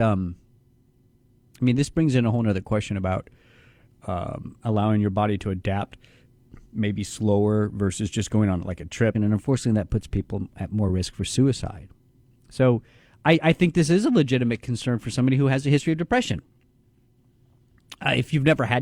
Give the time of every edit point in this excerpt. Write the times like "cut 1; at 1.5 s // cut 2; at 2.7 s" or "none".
cut 1; at 9.1 s